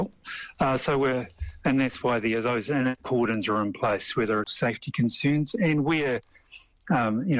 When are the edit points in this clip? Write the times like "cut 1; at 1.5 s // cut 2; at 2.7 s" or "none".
cut 1; at 4.4 s